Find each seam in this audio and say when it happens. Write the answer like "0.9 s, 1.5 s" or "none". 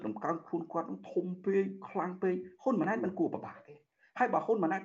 none